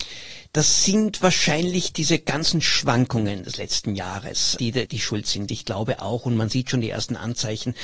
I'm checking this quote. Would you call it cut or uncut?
cut